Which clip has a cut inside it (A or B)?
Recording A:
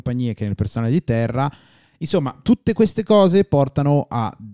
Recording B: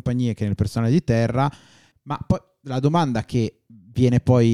B